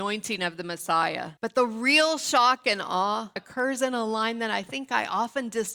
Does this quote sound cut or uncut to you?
cut